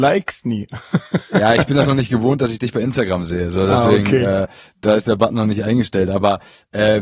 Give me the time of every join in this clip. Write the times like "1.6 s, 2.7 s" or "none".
none